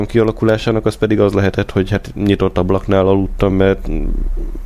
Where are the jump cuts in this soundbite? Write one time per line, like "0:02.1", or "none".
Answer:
none